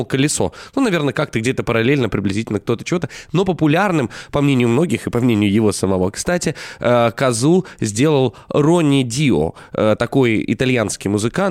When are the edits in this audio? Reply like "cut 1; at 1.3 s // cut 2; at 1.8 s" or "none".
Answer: none